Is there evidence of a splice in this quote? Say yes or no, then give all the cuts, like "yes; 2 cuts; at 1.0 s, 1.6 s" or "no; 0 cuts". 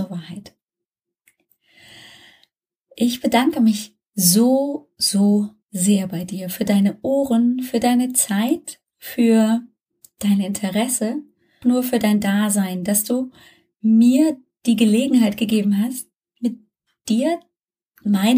yes; 2 cuts; at 5.6 s, 11.6 s